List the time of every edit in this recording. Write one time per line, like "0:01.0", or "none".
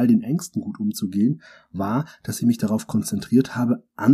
none